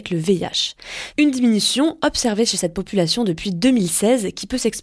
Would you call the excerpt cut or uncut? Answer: cut